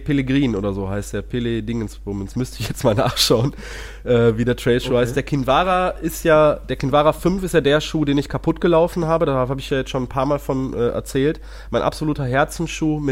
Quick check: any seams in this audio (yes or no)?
no